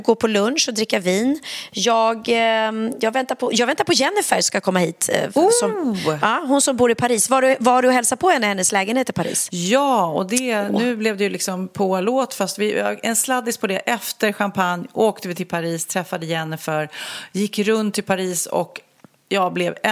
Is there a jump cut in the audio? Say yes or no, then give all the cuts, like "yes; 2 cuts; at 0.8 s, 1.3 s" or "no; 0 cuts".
no; 0 cuts